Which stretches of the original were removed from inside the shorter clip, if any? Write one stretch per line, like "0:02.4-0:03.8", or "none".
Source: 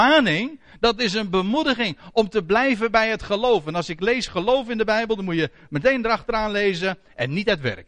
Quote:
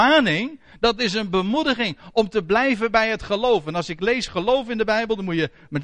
none